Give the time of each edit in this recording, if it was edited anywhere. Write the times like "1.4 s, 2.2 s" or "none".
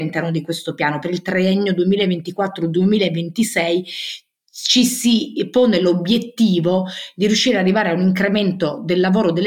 none